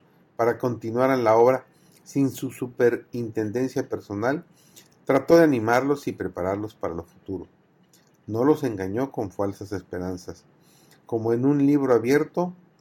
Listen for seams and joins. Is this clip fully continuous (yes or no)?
yes